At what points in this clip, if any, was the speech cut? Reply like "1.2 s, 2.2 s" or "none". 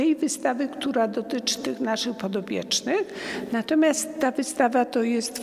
none